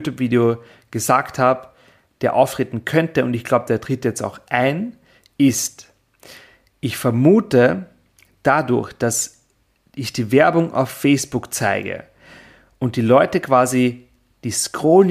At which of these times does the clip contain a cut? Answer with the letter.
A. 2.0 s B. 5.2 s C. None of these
C